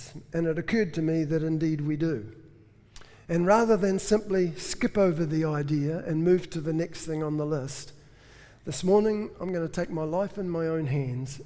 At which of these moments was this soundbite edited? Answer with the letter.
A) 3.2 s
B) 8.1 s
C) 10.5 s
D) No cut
D